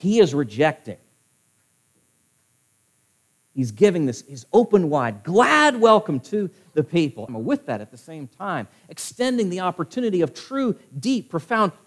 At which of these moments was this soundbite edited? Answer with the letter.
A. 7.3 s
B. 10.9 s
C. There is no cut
A